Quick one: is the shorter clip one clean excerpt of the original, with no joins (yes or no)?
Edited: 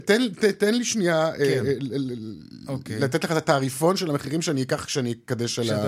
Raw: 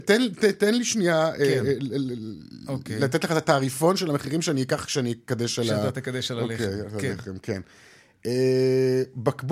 yes